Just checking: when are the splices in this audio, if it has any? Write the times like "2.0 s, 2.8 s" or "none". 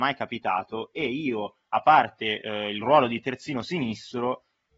none